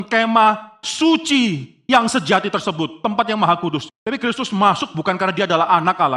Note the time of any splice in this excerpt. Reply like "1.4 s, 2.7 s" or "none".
3.9 s